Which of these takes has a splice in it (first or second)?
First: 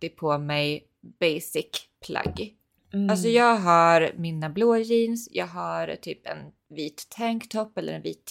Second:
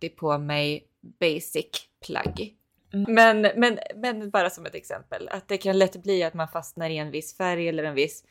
second